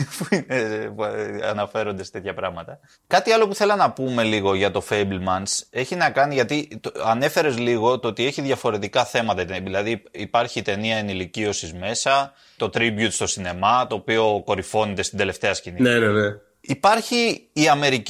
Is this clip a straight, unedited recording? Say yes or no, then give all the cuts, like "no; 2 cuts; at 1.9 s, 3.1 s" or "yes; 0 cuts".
no; 2 cuts; at 12.6 s, 15.8 s